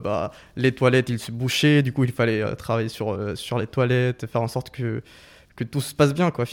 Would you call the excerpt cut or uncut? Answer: uncut